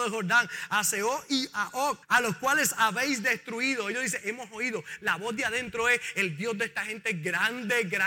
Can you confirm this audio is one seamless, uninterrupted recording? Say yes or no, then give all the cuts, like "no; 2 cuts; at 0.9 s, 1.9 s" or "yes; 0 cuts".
no; 1 cut; at 2.0 s